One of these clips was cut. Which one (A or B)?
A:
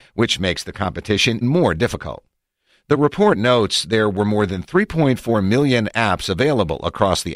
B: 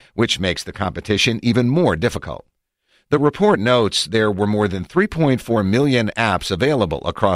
A